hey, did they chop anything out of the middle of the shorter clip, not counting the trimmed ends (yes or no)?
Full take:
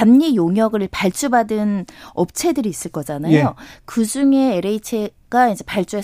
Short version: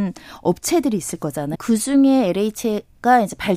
yes